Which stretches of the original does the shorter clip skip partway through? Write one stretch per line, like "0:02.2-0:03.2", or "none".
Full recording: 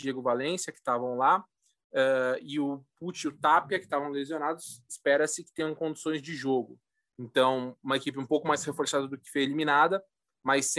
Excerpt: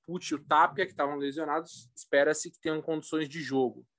none